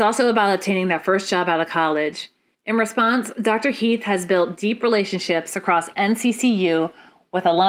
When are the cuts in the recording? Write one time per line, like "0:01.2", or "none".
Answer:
0:02.5